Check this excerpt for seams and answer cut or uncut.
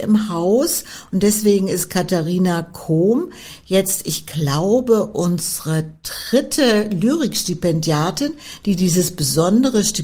uncut